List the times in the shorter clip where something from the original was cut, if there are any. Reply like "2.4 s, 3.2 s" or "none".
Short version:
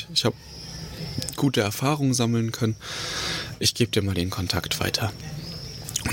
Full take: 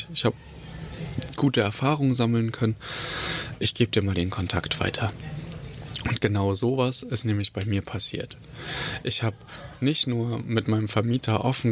none